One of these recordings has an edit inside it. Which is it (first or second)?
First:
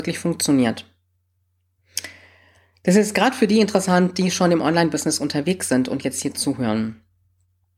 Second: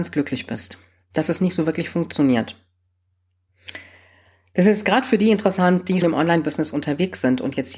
second